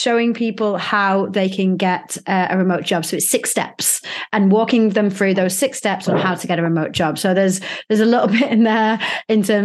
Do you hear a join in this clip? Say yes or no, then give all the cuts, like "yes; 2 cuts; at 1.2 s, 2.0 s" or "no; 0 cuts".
no; 0 cuts